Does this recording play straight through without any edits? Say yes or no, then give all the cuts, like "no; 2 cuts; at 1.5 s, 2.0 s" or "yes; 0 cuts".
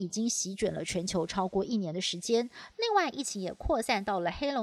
no; 1 cut; at 2.7 s